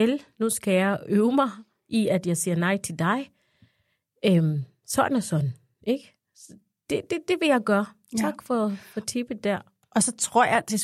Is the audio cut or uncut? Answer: uncut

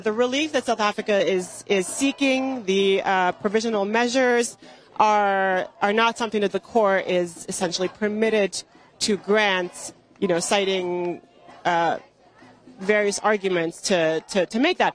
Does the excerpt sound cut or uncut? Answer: uncut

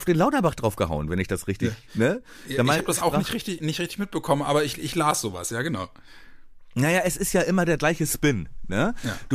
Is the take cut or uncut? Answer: cut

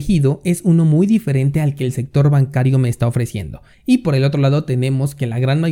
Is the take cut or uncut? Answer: cut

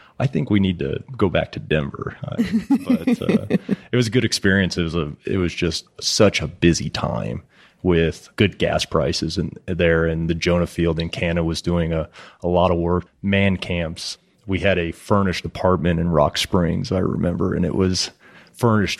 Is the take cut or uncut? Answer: cut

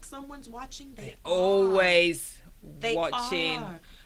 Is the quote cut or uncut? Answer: uncut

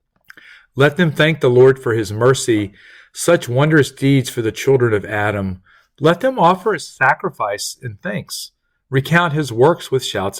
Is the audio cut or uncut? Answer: uncut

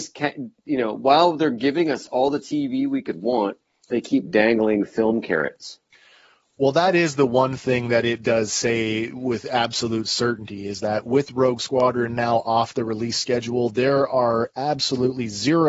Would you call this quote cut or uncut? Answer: uncut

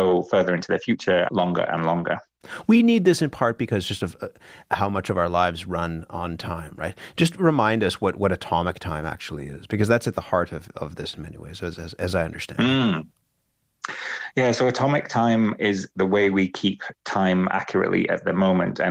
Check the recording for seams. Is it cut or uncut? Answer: cut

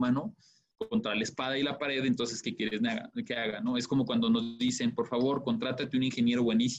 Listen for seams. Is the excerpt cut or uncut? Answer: uncut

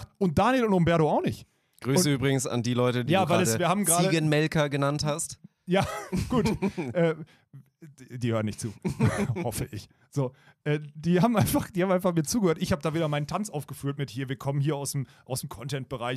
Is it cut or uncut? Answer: cut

